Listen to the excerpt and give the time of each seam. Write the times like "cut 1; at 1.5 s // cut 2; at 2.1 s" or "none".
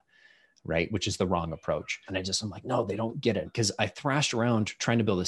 cut 1; at 2.1 s // cut 2; at 3.4 s